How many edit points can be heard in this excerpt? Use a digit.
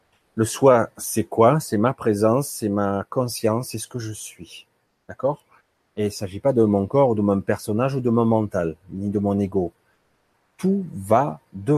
0